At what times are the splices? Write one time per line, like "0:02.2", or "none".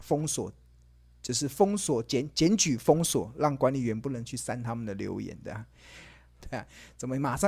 0:06.4